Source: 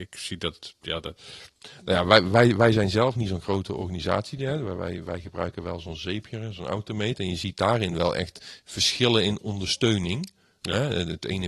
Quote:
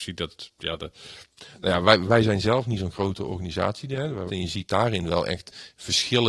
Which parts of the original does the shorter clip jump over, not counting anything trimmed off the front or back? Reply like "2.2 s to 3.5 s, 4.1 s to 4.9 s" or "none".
2.3 s to 2.6 s, 4.8 s to 7.2 s